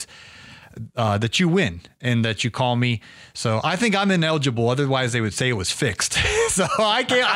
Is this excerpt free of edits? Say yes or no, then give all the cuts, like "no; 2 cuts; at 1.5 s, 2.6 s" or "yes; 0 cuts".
yes; 0 cuts